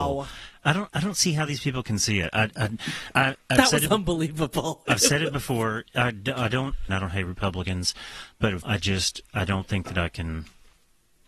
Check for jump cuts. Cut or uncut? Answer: cut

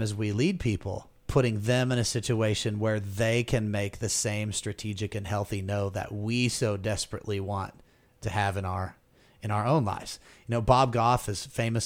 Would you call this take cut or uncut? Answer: cut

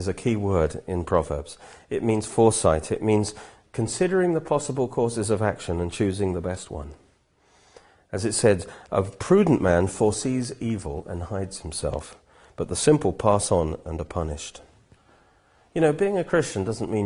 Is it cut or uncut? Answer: uncut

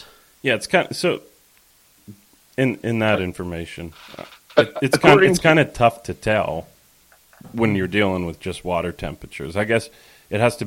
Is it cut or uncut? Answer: uncut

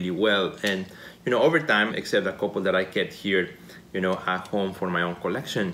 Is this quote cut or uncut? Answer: cut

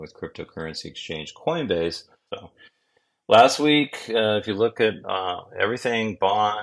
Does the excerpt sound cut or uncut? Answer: cut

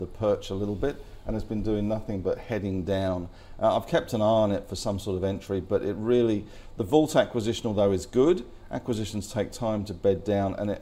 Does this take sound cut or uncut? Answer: uncut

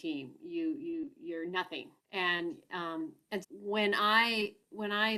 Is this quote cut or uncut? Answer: cut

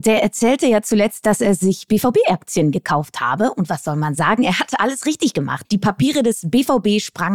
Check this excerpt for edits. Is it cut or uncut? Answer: cut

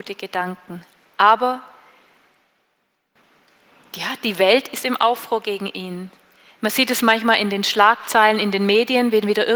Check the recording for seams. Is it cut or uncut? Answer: cut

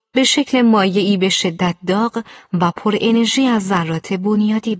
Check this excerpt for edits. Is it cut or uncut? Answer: uncut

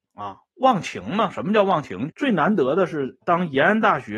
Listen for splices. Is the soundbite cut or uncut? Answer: cut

